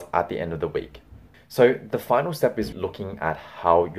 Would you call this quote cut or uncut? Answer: cut